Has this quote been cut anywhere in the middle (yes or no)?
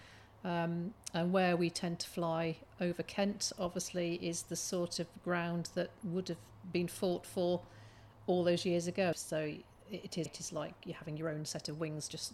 yes